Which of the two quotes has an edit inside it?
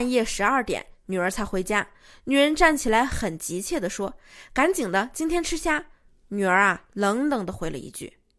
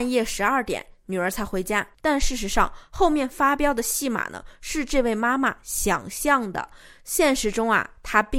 second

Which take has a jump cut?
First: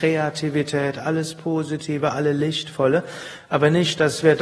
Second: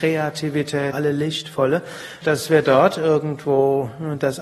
second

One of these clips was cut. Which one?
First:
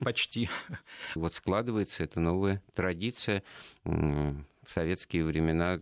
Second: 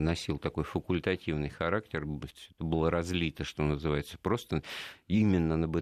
first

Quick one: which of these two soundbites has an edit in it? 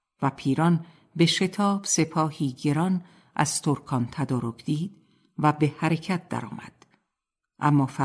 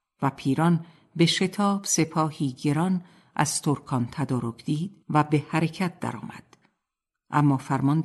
second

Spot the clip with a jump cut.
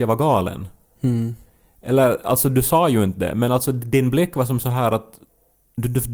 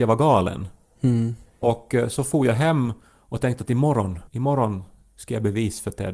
second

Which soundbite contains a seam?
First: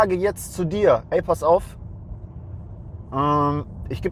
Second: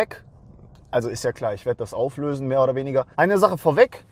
second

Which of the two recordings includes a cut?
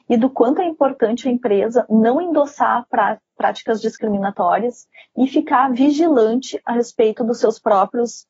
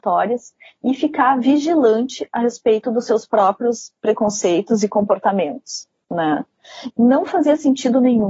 second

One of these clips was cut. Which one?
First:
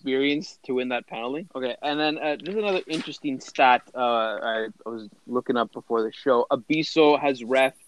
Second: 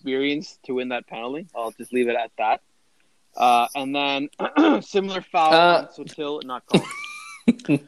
first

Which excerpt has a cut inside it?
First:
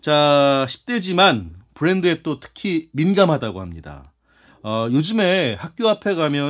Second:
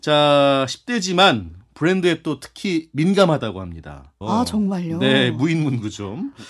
second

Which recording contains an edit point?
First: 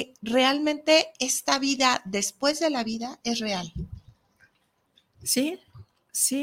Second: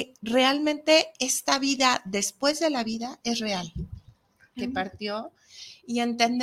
second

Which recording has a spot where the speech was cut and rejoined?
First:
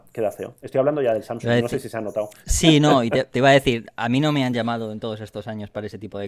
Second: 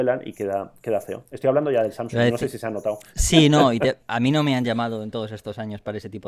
second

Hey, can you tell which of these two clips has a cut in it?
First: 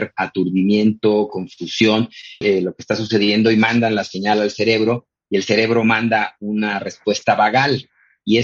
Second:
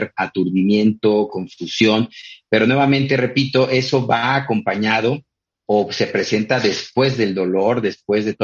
first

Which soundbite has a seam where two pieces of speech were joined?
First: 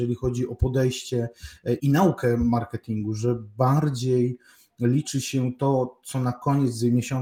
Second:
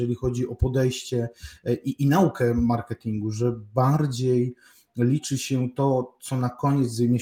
first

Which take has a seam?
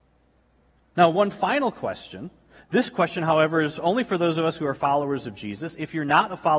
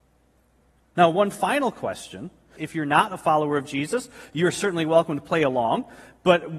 second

